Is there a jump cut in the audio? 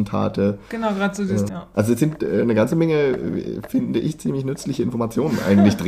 yes; 1 cut; at 1.5 s

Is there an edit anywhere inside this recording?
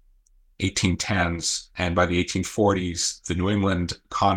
no; 0 cuts

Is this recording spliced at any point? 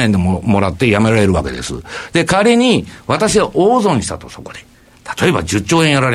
no; 0 cuts

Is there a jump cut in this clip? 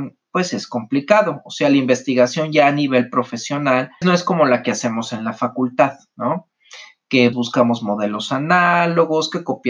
yes; 2 cuts; at 4.0 s, 7.3 s

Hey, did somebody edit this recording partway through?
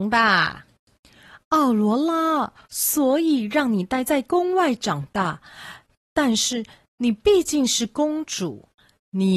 yes; 1 cut; at 2.6 s

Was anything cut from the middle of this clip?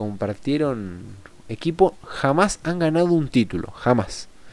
no; 0 cuts

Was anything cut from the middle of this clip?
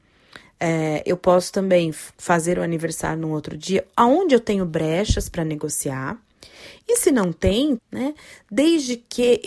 yes; 1 cut; at 7.8 s

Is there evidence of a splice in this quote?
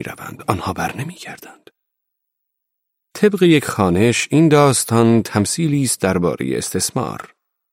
no; 0 cuts

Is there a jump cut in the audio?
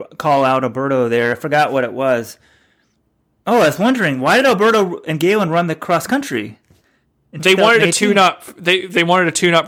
no; 0 cuts

